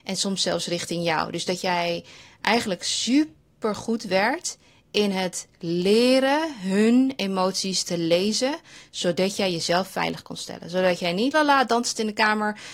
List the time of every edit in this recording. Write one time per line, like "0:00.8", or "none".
0:11.3